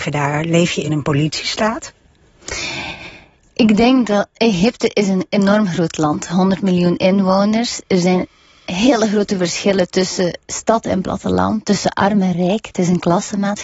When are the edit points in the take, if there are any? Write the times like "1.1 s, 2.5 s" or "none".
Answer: none